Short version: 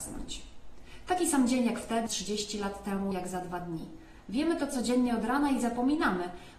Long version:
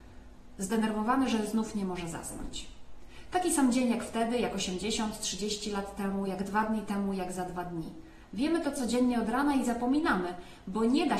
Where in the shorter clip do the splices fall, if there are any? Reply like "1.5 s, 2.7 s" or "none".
2.1 s, 3.1 s